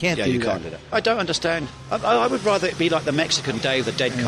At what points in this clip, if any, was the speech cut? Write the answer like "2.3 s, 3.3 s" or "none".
0.9 s